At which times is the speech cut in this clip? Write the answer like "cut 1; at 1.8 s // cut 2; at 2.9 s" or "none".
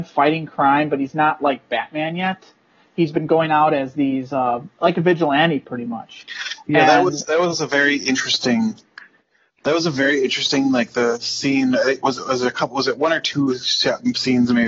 none